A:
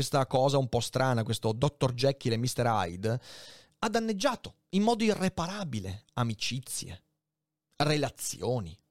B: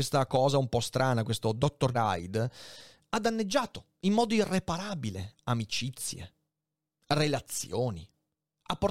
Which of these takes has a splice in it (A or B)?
B